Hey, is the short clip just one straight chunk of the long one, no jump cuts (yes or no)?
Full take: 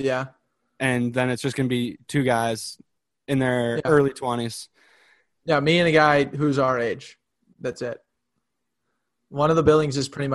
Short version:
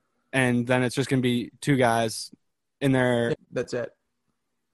no